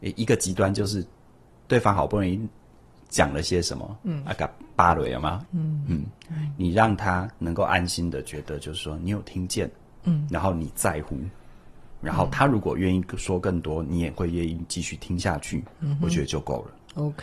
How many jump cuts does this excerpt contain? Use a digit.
1